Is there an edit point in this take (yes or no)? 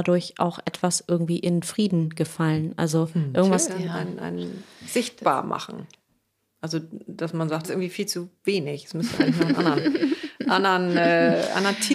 yes